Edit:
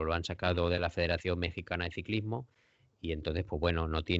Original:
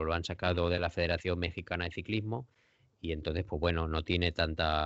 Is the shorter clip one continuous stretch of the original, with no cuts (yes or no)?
yes